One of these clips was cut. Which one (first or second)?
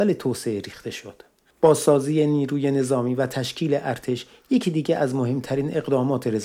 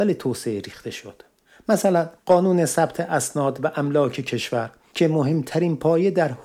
first